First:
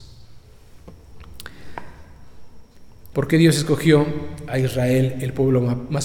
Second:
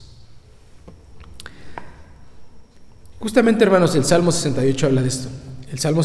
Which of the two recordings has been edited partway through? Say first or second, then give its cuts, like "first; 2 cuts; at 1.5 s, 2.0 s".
first; 1 cut; at 3.1 s